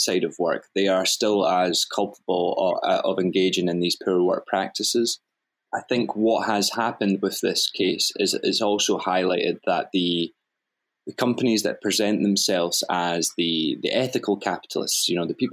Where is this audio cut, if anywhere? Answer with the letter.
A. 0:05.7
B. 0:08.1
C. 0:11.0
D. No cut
A